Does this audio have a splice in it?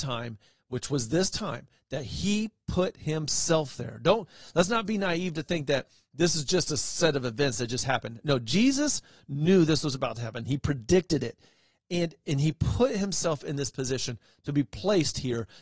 no; 0 cuts

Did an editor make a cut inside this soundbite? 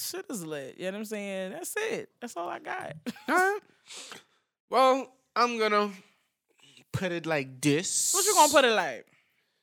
no; 0 cuts

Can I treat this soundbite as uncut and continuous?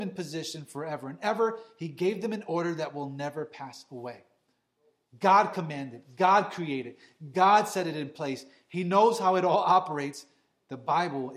yes; 0 cuts

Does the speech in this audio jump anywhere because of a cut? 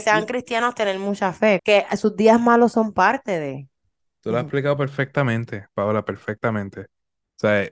yes; 1 cut; at 1.6 s

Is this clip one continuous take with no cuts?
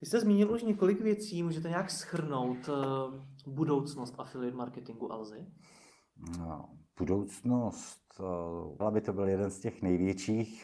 no; 2 cuts; at 6.9 s, 8.8 s

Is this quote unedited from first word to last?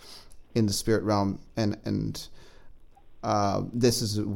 yes; 0 cuts

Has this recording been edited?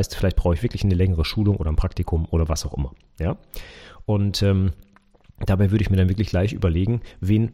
no; 0 cuts

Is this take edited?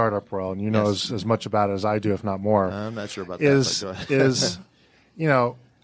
no; 0 cuts

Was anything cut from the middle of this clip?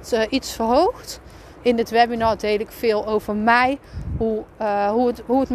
yes; 1 cut; at 1.6 s

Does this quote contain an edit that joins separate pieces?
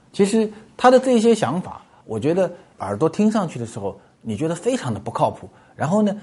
yes; 1 cut; at 2.0 s

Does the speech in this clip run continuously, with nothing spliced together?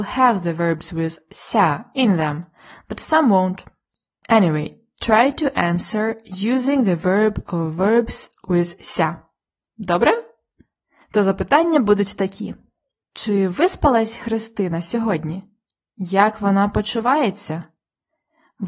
yes; 0 cuts

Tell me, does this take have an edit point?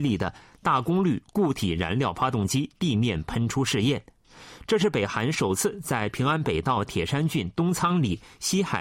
no; 0 cuts

